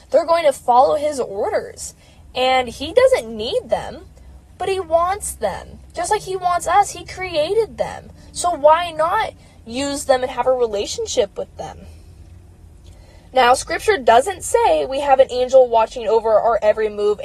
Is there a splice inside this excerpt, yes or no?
no